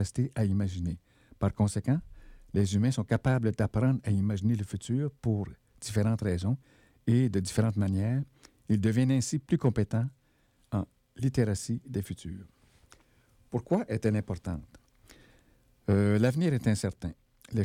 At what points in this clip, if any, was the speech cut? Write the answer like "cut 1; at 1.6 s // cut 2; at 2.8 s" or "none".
none